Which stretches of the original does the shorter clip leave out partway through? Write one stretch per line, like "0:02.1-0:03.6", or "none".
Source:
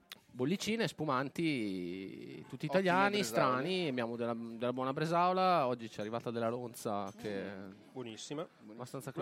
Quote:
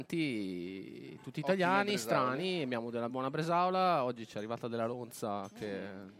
0:04.4-0:04.7